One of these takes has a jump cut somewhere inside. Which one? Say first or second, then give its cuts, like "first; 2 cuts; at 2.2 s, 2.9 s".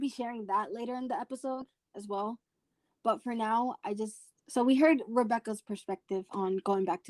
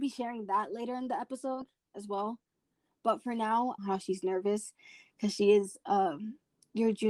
second; 1 cut; at 3.8 s